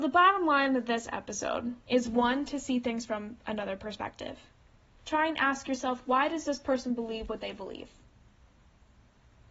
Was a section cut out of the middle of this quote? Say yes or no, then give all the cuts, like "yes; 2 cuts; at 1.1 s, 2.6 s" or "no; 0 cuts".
yes; 2 cuts; at 1.8 s, 5.0 s